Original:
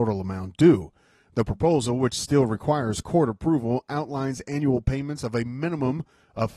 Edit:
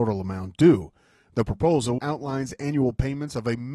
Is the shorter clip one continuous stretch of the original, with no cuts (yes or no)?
no